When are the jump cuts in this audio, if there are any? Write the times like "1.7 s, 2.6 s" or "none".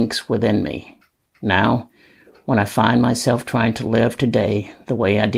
1.2 s